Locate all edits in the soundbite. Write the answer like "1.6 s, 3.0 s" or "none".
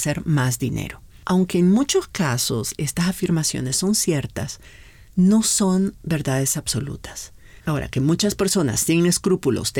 7.6 s

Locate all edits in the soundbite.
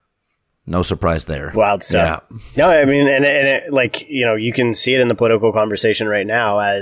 none

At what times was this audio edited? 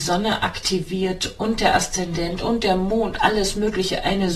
none

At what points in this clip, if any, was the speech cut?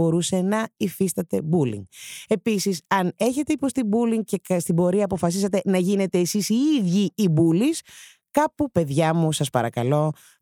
none

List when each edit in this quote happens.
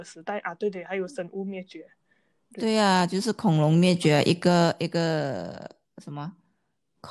none

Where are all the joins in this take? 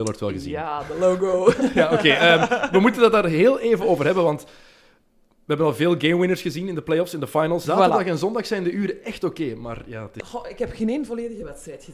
7.6 s, 10.2 s

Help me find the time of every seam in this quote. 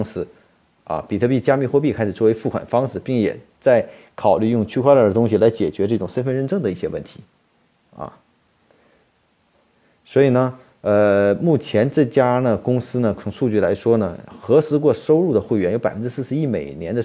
none

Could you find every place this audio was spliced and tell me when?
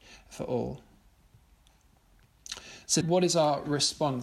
3.0 s

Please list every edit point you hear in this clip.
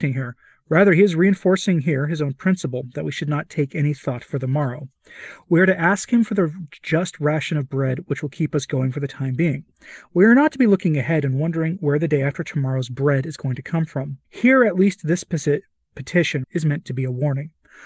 14.2 s, 16.4 s

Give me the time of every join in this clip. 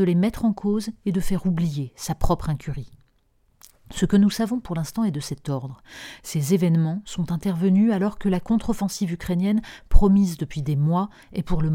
none

